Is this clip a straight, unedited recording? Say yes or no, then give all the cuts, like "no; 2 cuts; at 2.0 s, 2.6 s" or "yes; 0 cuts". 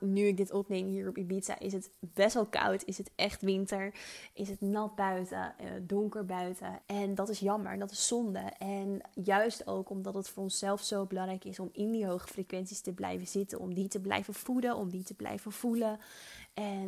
no; 1 cut; at 6.8 s